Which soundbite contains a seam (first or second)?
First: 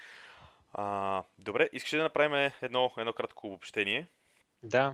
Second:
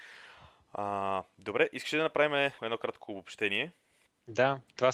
second